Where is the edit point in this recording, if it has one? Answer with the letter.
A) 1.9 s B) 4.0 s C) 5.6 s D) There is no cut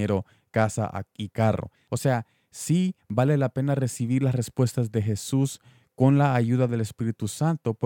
A